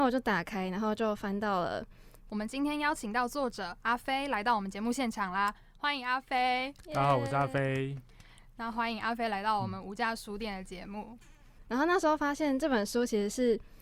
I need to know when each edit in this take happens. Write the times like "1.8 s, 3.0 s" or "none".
2.3 s, 11.6 s